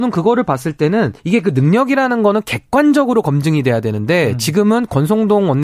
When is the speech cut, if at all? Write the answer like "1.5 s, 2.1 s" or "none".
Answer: 1.2 s